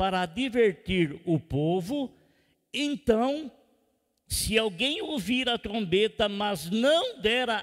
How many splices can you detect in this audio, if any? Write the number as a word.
zero